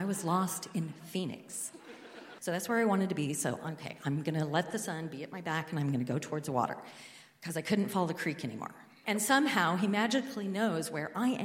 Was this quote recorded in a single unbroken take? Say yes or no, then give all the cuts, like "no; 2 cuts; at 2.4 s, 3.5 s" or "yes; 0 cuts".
no; 2 cuts; at 2.4 s, 9.0 s